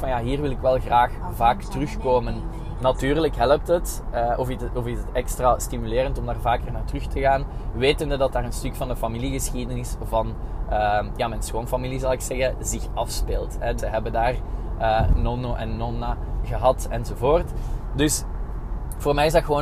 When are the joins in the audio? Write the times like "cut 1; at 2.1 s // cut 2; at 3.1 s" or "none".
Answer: cut 1; at 13.8 s